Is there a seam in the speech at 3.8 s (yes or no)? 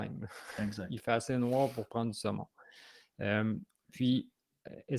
no